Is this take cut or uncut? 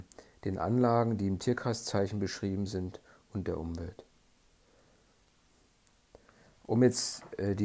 uncut